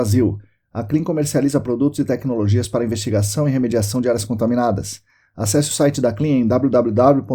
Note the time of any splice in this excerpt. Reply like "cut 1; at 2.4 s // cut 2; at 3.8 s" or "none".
none